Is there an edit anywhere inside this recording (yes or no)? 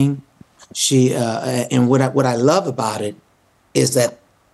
yes